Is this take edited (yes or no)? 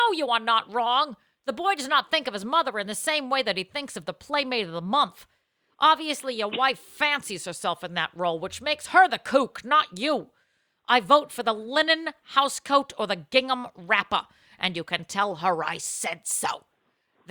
no